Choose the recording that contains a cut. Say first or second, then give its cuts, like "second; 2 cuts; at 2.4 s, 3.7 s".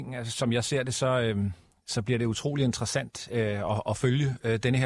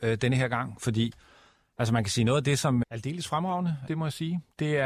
second; 2 cuts; at 2.8 s, 3.9 s